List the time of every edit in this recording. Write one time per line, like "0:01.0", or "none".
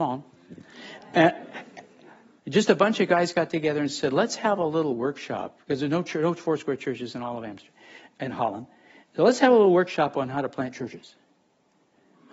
0:02.4

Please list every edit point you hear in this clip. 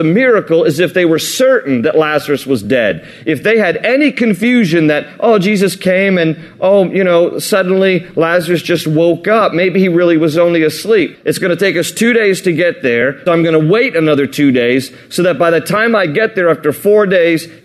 0:11.1
0:13.3

